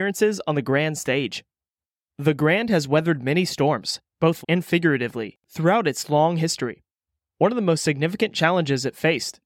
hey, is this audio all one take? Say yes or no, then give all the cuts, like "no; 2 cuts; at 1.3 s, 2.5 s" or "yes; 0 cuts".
no; 1 cut; at 4.4 s